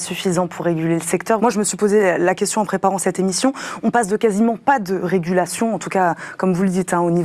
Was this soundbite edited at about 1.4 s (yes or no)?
yes